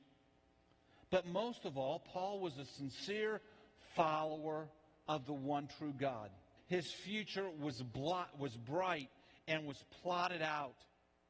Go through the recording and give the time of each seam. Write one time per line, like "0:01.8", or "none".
0:06.6

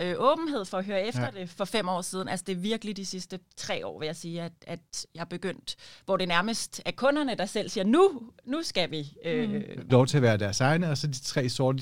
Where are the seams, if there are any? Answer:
0:09.9

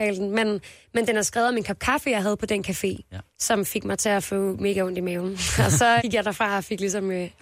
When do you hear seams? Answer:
0:06.0

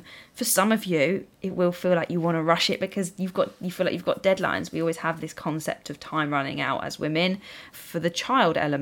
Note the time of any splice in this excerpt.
0:07.7

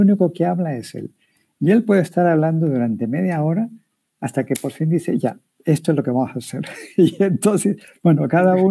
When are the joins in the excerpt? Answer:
none

